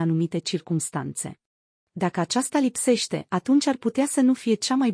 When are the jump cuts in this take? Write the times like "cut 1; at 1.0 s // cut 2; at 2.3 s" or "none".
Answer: cut 1; at 1.8 s